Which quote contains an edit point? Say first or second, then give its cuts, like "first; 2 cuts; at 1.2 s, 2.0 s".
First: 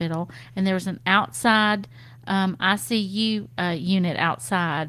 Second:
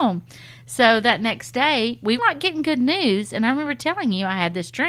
second; 1 cut; at 2.2 s